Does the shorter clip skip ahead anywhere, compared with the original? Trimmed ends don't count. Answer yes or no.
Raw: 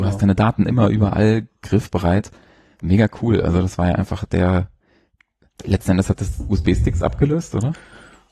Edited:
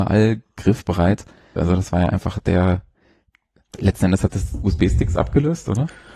yes